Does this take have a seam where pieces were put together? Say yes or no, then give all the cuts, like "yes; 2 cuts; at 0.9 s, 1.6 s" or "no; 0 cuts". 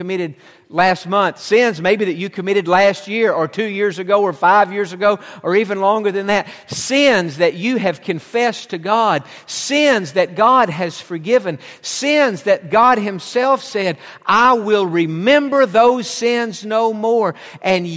no; 0 cuts